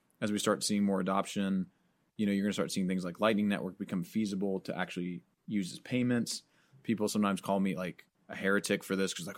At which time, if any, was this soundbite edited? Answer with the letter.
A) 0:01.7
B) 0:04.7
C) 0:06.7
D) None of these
D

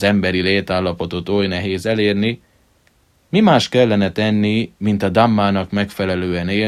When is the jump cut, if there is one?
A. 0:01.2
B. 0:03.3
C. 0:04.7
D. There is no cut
D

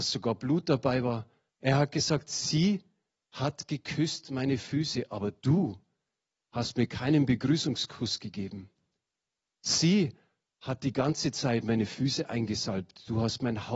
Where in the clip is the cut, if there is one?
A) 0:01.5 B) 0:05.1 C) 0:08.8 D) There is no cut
A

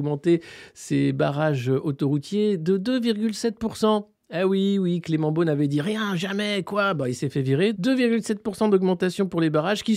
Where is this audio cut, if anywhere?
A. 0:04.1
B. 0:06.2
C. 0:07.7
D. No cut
C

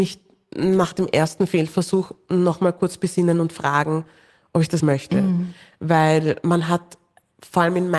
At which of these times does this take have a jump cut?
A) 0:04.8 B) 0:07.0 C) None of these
A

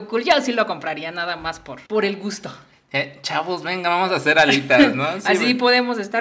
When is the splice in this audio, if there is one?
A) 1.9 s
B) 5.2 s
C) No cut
A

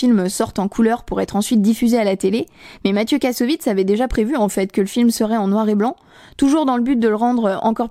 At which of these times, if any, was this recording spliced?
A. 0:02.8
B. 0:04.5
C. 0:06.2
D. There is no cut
D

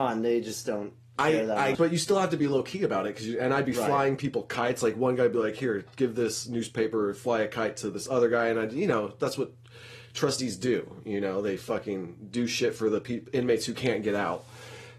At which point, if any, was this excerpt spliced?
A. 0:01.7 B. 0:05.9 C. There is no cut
A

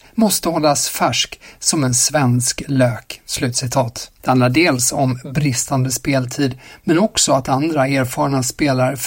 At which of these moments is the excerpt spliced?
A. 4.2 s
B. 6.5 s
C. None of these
A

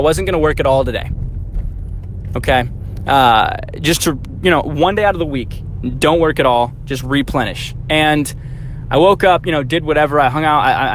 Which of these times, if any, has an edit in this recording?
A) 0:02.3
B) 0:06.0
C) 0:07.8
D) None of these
D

